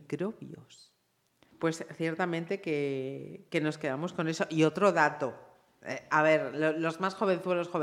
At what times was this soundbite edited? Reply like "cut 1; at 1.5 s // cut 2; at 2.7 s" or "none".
cut 1; at 1.5 s